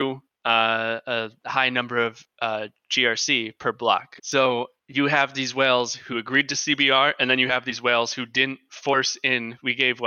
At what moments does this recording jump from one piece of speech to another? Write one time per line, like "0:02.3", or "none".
0:04.2